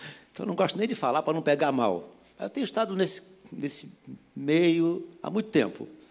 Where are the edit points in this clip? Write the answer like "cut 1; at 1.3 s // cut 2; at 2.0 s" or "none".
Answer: none

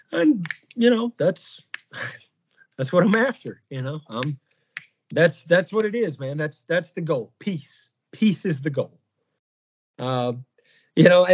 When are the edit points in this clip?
none

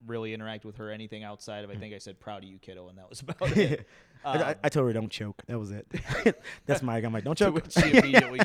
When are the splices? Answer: none

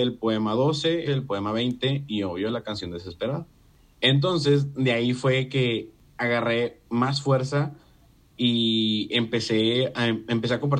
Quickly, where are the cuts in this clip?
cut 1; at 1.1 s

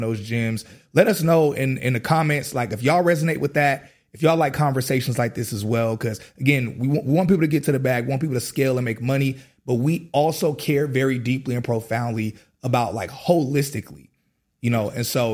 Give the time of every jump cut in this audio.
none

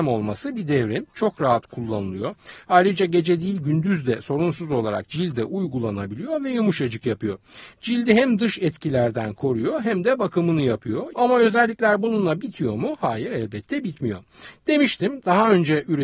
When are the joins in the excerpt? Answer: cut 1; at 11.1 s

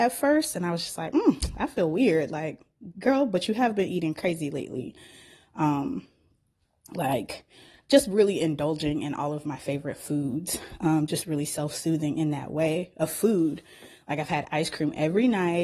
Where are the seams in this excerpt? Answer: none

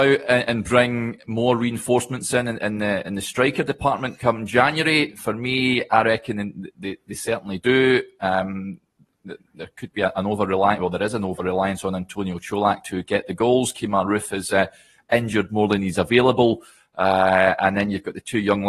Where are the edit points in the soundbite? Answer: none

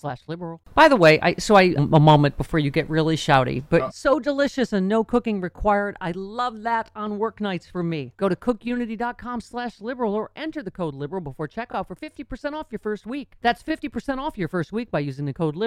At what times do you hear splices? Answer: cut 1; at 1.8 s // cut 2; at 3.9 s

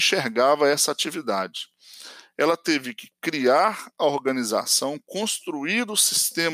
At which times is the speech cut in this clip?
none

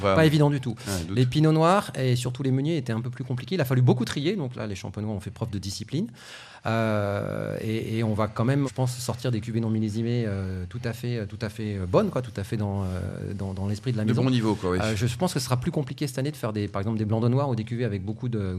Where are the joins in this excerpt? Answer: cut 1; at 8.6 s

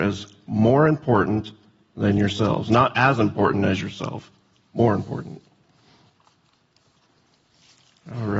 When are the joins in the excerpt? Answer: none

